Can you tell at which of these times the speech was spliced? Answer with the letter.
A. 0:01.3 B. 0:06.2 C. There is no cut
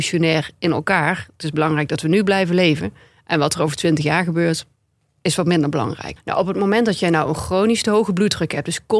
B